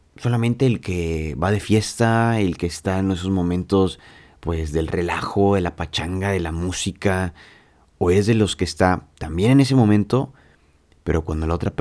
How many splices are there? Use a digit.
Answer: 0